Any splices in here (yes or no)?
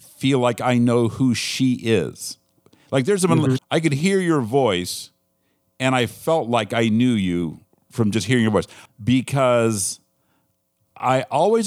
yes